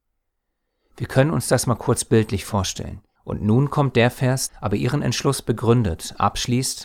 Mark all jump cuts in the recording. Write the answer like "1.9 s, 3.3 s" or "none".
3.2 s, 4.5 s

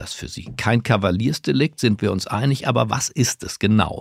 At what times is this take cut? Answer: none

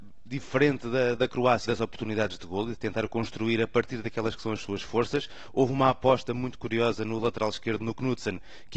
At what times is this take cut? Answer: 1.6 s

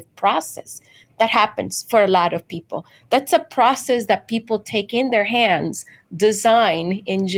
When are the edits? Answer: none

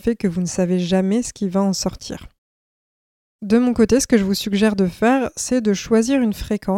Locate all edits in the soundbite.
none

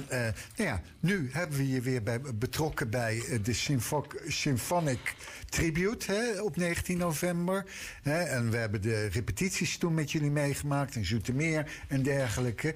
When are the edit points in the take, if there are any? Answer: 8.0 s

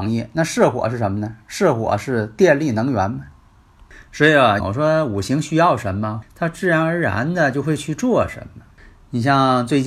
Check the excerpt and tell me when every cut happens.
4.6 s, 6.2 s

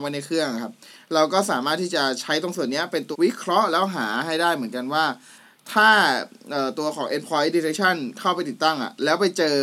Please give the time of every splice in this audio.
3.1 s

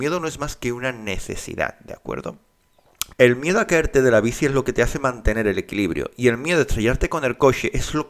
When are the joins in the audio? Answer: 3.1 s

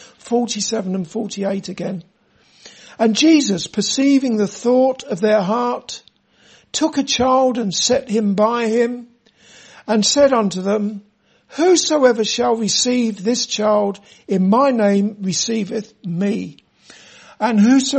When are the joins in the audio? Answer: none

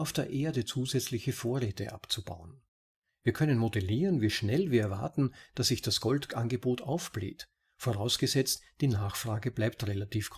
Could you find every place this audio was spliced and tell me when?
none

